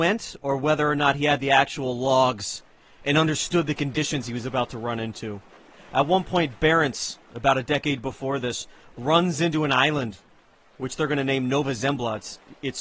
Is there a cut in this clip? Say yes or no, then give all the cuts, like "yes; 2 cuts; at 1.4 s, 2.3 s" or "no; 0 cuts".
no; 0 cuts